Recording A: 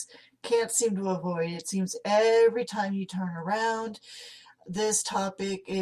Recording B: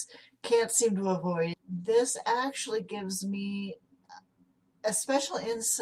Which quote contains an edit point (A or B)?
B